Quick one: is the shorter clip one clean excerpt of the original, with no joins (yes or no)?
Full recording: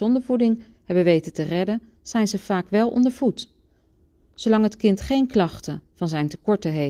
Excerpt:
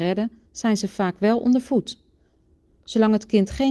yes